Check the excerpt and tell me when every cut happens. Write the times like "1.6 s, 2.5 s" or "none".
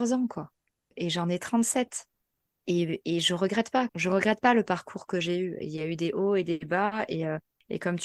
2.5 s, 3.9 s